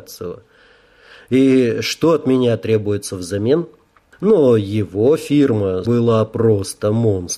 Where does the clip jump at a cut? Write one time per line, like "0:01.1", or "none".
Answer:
0:04.1
0:05.8